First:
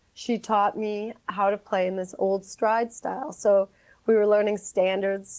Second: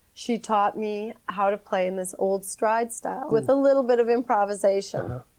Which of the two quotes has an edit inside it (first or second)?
second